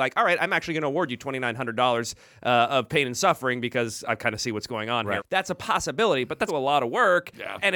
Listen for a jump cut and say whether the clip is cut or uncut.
cut